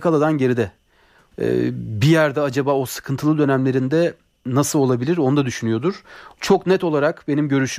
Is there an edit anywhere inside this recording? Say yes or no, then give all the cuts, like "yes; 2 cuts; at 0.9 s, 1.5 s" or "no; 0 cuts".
yes; 2 cuts; at 1.3 s, 6.4 s